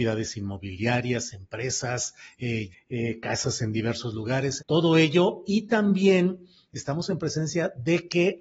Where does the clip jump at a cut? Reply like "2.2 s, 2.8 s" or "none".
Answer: 2.7 s, 4.6 s